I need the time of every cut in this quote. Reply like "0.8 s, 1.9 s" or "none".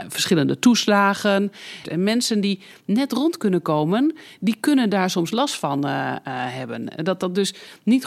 1.8 s